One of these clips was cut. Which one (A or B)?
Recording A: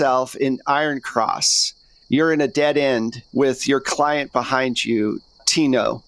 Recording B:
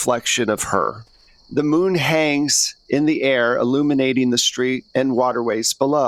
A